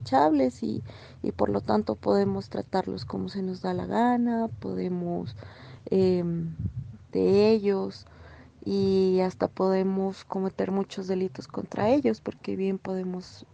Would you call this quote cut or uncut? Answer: cut